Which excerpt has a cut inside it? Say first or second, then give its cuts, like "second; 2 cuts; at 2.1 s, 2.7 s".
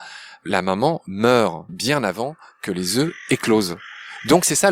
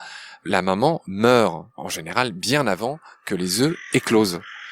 first; 1 cut; at 1.7 s